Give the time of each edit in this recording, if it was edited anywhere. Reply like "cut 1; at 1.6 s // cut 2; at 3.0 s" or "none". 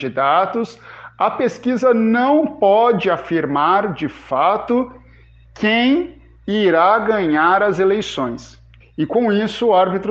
cut 1; at 8.8 s